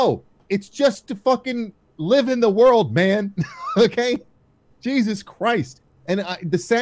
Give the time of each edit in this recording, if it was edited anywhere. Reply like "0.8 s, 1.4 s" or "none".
none